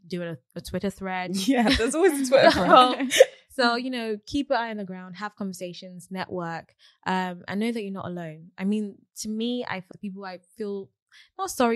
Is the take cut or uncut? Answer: cut